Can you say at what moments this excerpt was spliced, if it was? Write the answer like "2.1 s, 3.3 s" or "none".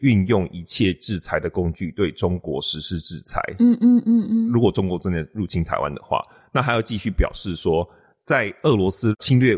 none